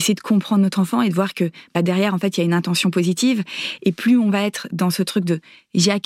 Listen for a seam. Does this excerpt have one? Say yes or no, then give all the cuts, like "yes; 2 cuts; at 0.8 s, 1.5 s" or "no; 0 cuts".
no; 0 cuts